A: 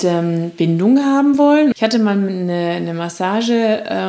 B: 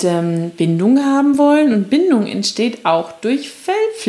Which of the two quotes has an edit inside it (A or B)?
A